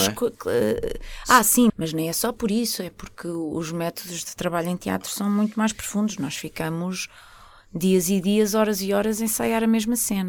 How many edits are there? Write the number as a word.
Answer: one